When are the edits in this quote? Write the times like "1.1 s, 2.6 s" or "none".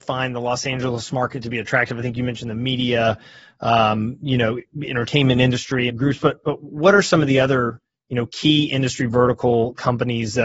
5.9 s